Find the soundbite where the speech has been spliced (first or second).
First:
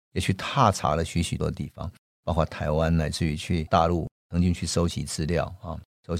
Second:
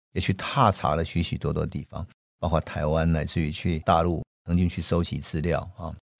first